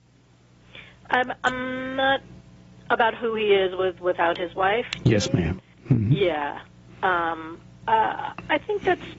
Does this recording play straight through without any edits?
yes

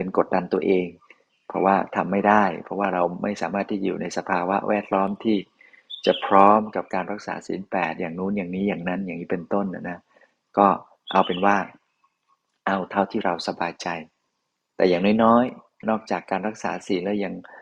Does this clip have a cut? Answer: yes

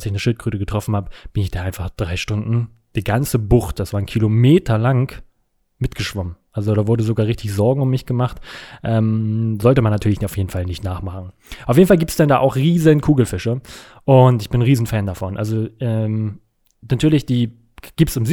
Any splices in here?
no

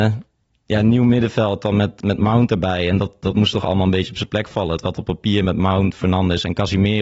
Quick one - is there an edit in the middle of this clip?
no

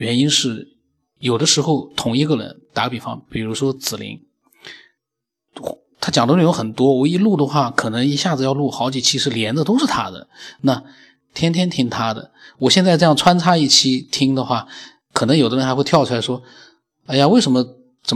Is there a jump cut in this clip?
no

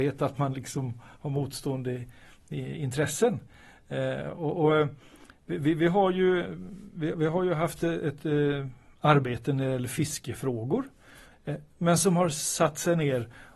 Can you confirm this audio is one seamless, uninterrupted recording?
no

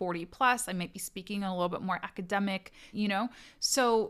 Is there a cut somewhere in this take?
yes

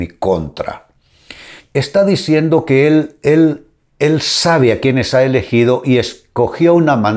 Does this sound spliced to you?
yes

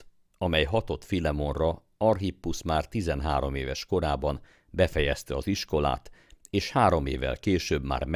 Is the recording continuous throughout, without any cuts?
yes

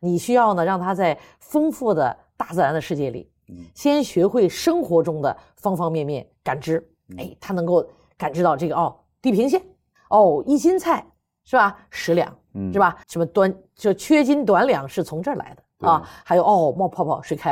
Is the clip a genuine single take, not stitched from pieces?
no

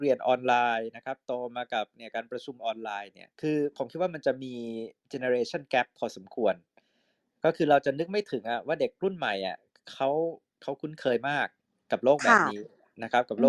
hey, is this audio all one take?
no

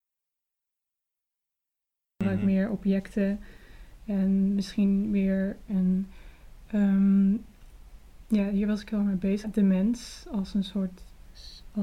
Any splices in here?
yes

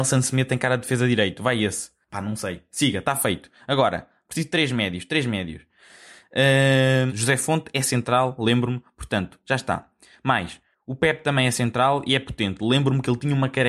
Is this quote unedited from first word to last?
no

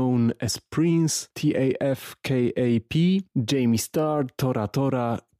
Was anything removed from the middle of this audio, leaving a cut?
no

